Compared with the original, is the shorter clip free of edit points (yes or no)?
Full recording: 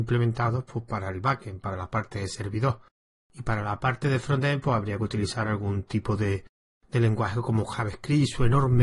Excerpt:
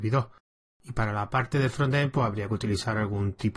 yes